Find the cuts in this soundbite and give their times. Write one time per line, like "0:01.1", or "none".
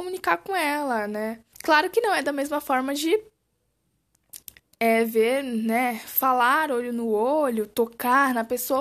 0:01.5